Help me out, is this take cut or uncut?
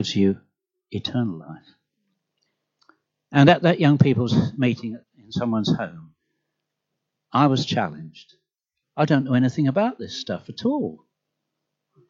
cut